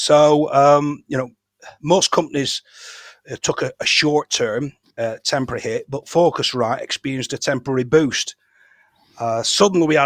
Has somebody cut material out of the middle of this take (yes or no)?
no